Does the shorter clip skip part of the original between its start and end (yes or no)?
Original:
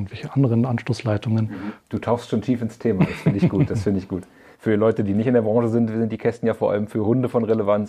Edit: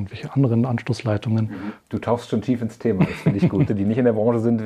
yes